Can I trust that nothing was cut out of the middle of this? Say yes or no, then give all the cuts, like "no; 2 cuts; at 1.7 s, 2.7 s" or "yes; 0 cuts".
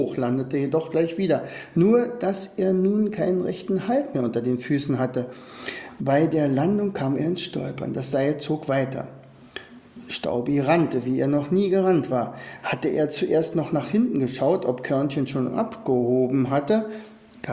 yes; 0 cuts